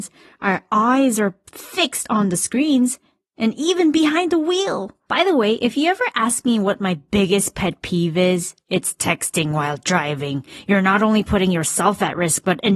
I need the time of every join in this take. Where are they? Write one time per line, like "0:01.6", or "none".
none